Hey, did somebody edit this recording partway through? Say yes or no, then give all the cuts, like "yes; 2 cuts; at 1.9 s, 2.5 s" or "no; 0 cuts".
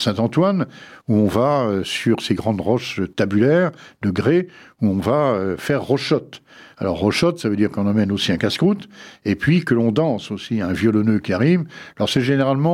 no; 0 cuts